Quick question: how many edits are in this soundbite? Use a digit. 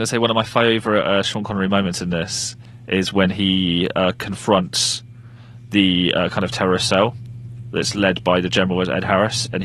0